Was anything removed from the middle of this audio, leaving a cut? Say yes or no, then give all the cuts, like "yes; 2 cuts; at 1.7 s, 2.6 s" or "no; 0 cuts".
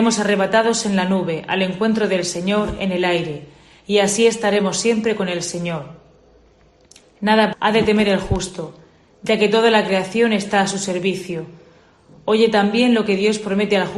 yes; 1 cut; at 7.5 s